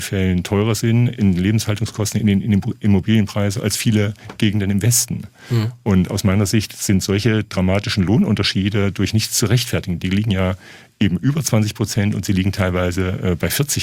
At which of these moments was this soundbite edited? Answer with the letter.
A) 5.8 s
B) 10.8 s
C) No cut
C